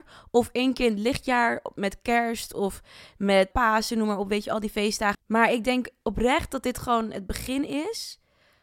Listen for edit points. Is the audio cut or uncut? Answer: cut